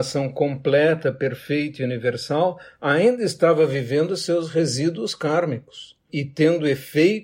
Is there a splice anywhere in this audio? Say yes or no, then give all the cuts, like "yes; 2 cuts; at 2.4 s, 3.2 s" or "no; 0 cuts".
yes; 1 cut; at 6.1 s